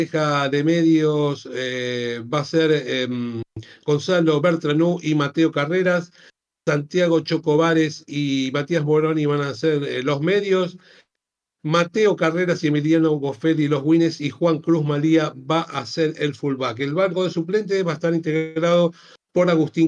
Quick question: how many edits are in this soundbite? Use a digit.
0